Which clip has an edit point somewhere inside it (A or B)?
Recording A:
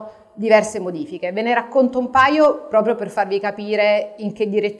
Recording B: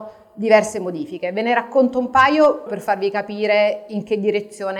B